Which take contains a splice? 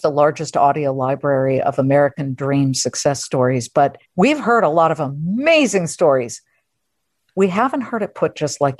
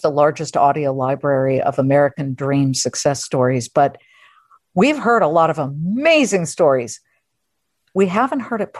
first; 1 cut; at 4.1 s

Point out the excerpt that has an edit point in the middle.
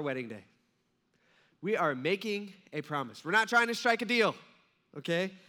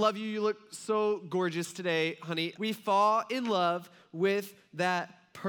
second; 1 cut; at 2.5 s

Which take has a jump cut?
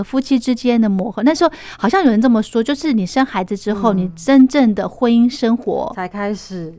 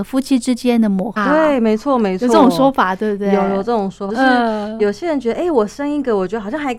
second; 2 cuts; at 1.2 s, 4.1 s

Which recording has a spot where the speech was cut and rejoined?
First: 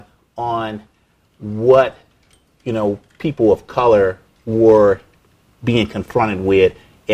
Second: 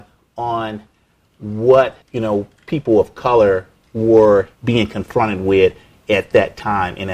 second; 2 cuts; at 2.0 s, 4.5 s

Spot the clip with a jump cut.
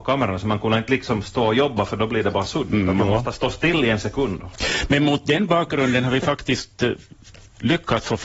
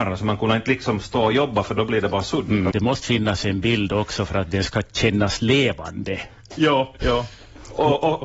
second; 1 cut; at 2.7 s

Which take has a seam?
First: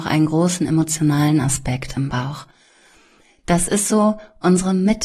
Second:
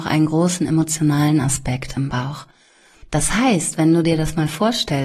second; 1 cut; at 3.0 s

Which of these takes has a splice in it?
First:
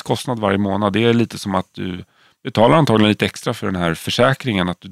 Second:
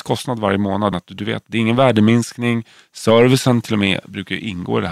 second; 1 cut; at 0.9 s

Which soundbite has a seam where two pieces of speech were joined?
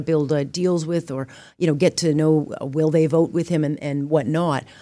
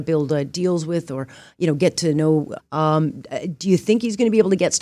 second; 1 cut; at 2.6 s

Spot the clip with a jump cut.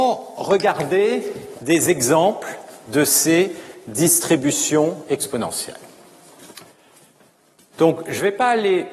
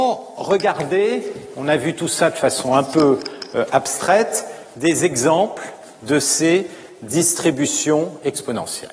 first; 2 cuts; at 1.5 s, 7.7 s

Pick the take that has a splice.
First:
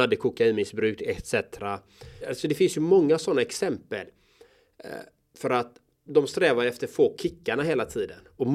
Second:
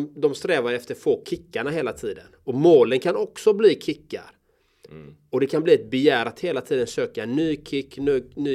first; 2 cuts; at 2.2 s, 6.1 s

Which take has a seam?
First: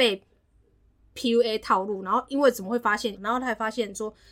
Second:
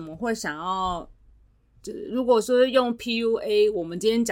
first; 1 cut; at 3.1 s

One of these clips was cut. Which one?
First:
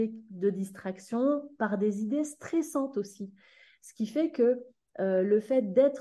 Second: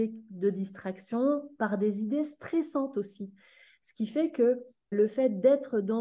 second; 1 cut; at 4.9 s

